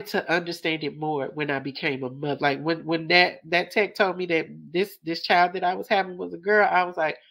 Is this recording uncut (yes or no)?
no